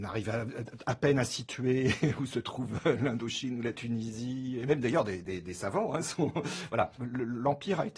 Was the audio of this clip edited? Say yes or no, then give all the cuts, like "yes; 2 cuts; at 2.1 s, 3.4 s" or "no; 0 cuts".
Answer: no; 0 cuts